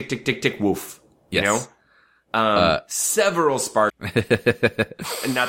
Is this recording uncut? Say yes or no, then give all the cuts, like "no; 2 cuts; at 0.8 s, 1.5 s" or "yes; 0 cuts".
no; 1 cut; at 3.9 s